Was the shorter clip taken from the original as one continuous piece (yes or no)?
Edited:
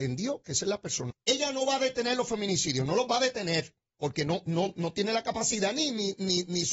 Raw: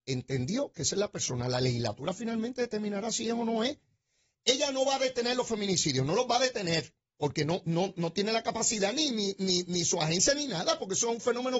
no